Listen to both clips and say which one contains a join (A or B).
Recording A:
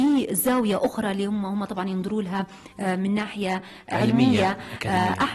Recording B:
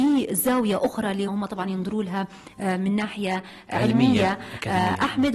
B